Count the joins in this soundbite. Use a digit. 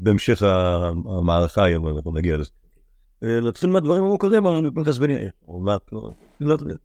1